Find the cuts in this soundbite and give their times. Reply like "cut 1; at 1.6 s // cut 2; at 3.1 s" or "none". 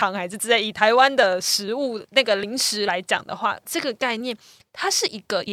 cut 1; at 3.7 s